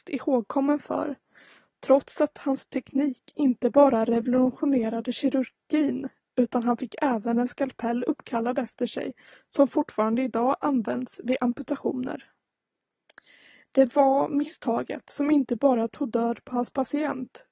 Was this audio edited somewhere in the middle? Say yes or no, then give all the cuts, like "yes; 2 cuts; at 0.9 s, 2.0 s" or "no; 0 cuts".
no; 0 cuts